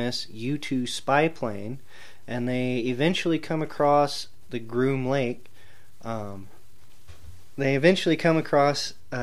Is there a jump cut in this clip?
no; 0 cuts

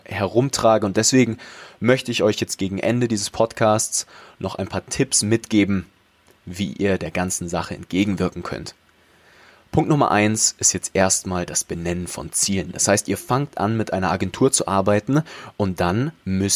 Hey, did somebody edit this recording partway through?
no; 0 cuts

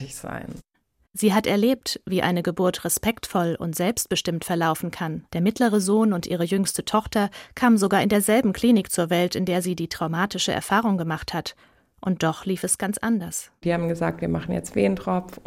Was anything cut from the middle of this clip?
yes; 1 cut; at 5.3 s

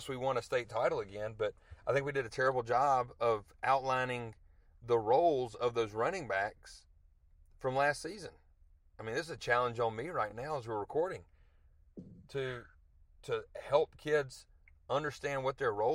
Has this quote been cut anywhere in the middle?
no; 0 cuts

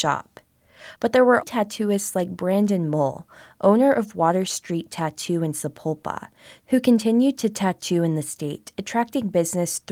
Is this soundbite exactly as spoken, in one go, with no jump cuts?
no; 1 cut; at 1.4 s

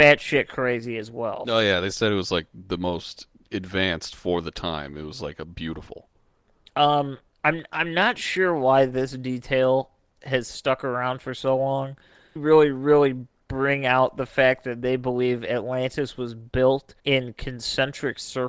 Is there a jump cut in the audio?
yes; 2 cuts; at 12.4 s, 17.0 s

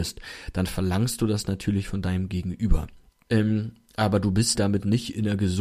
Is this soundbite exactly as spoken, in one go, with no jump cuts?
no; 2 cuts; at 3.3 s, 4.5 s

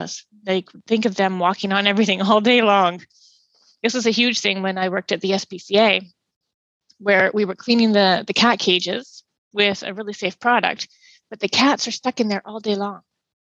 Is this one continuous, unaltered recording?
yes; 0 cuts

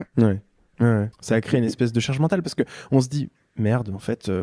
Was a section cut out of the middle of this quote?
yes; 1 cut; at 1.1 s

